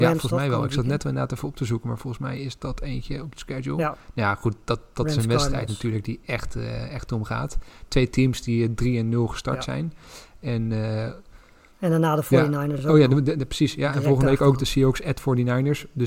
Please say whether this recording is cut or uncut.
uncut